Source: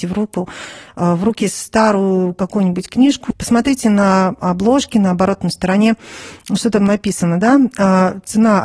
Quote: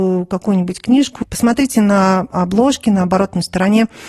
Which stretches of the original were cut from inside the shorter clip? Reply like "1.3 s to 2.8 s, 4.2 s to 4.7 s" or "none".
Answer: none